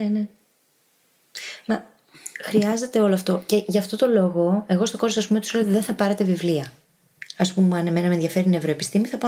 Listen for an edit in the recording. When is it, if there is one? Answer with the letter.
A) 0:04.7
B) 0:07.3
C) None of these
B